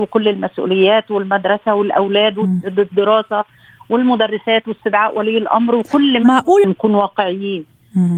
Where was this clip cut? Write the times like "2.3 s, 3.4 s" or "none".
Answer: 6.6 s